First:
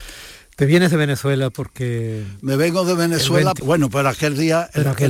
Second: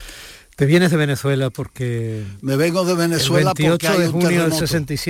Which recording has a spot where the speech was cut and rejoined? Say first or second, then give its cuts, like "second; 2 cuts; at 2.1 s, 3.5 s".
first; 1 cut; at 3.6 s